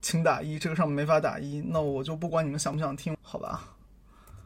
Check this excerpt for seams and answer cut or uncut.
cut